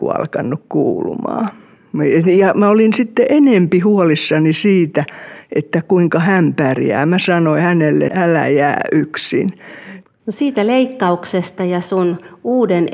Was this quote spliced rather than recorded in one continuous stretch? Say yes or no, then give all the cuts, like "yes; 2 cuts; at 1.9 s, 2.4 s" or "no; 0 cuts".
yes; 2 cuts; at 8.1 s, 10.0 s